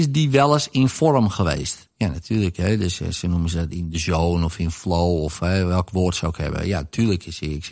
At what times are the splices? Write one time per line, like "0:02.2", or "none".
none